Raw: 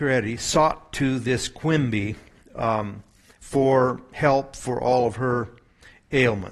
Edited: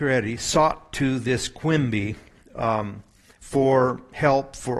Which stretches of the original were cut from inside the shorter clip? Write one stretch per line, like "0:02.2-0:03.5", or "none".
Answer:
none